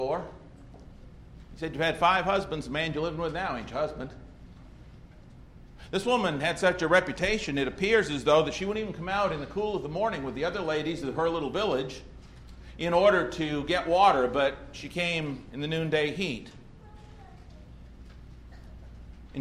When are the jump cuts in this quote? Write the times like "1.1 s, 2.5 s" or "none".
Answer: none